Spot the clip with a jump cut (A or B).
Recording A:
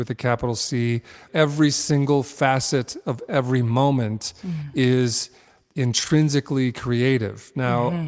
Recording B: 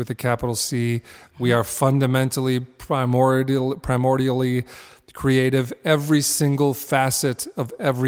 A